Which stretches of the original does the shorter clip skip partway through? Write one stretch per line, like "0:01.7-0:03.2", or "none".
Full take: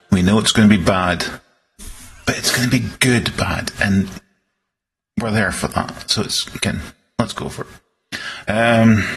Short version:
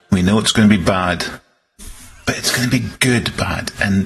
none